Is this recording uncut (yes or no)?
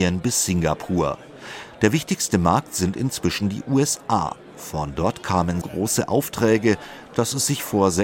no